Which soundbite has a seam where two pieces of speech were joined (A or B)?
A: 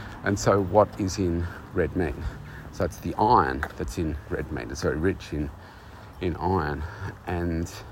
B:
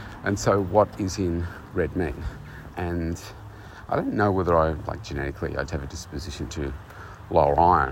B